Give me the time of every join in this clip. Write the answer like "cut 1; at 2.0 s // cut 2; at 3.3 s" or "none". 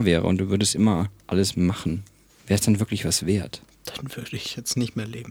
cut 1; at 2.3 s